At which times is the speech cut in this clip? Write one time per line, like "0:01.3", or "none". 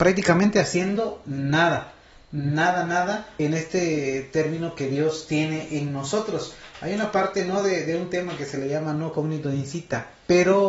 0:03.4